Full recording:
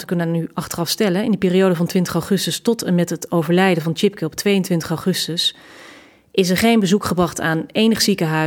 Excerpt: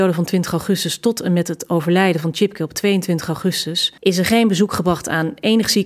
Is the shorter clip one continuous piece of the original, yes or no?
no